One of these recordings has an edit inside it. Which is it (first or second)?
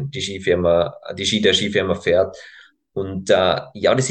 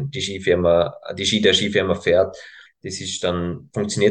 second